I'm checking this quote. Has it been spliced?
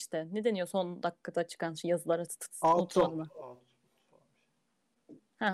yes; 1 cut; at 2.3 s

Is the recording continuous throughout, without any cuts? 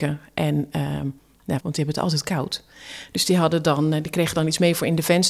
no; 1 cut; at 1.6 s

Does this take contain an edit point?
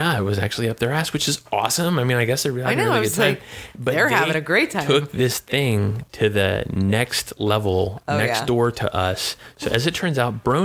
no; 0 cuts

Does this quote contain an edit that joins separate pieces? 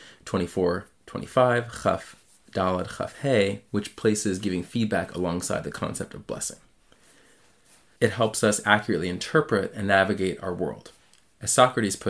yes; 1 cut; at 8.0 s

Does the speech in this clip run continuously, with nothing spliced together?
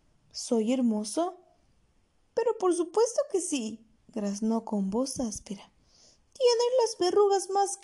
yes; 0 cuts

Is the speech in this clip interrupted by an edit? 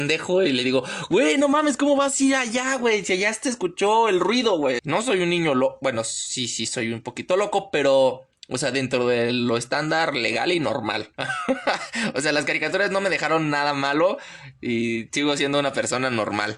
yes; 1 cut; at 4.8 s

